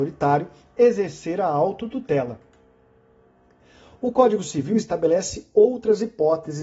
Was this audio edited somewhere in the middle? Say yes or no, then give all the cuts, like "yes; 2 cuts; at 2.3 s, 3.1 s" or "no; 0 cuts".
no; 0 cuts